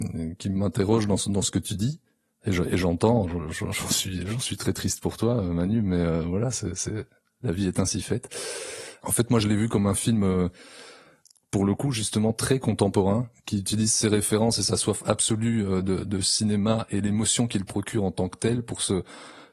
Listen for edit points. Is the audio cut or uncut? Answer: uncut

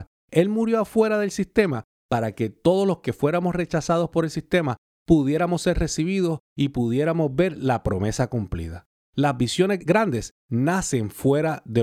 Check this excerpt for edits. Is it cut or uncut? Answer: cut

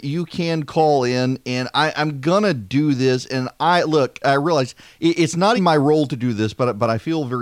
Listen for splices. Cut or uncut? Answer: cut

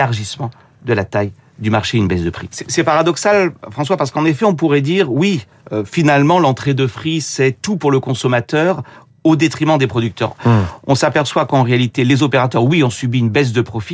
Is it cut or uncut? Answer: cut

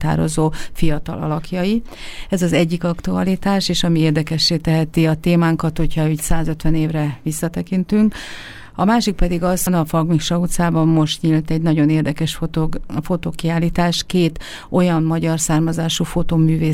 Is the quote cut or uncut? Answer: cut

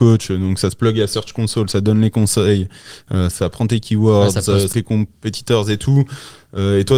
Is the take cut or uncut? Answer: cut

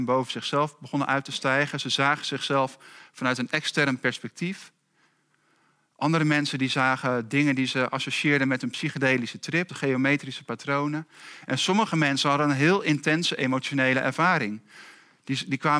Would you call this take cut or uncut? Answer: cut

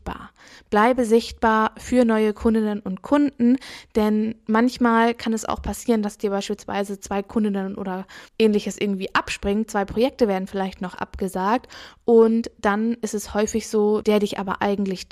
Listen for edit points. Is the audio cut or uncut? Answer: cut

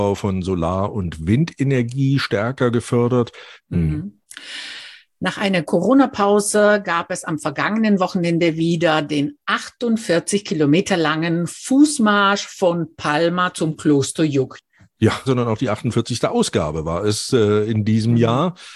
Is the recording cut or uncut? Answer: cut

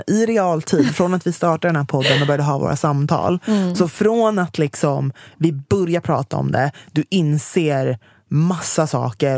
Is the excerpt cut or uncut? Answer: uncut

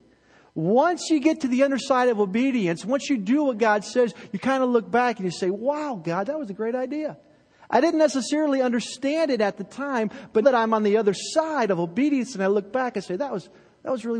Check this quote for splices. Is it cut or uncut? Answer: cut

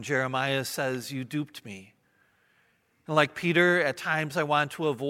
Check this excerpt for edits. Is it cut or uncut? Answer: uncut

